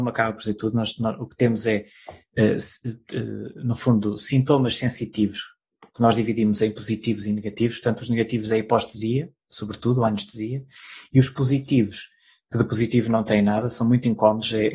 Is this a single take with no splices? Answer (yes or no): yes